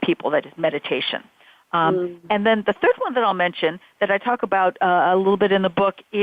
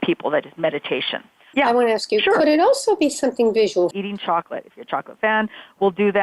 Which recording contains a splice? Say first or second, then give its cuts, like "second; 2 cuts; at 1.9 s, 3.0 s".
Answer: second; 2 cuts; at 1.5 s, 3.9 s